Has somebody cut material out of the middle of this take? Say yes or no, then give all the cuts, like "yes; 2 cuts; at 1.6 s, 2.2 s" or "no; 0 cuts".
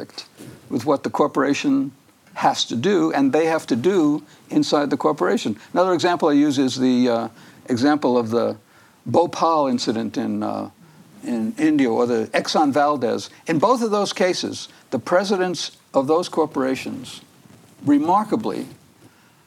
no; 0 cuts